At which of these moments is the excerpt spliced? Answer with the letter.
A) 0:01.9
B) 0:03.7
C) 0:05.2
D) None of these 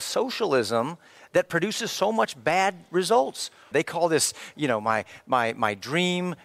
B